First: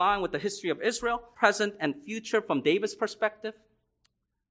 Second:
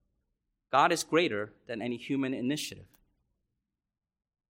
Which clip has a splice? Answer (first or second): first